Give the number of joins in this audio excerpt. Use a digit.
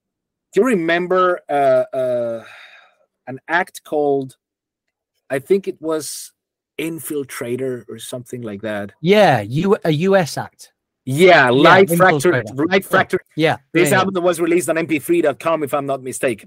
1